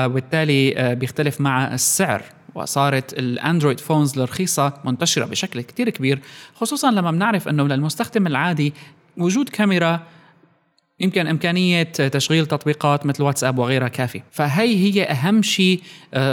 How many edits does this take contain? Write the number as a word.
one